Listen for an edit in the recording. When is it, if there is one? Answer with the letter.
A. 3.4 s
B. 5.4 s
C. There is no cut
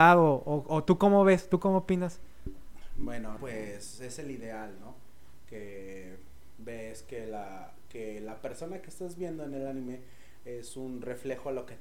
A